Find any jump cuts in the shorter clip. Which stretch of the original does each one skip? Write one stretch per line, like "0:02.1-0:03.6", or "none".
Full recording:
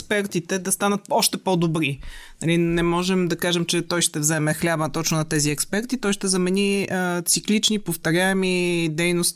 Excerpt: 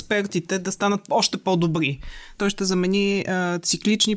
0:02.4-0:06.0